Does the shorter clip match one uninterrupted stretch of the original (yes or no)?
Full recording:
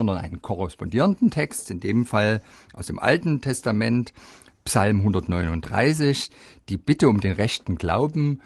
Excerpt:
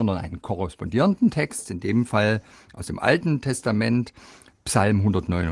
yes